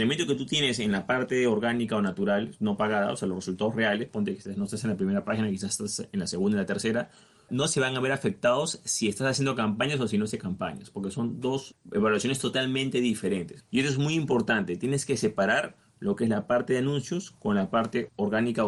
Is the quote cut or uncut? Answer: cut